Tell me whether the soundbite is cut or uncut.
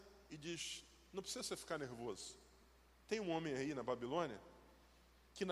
uncut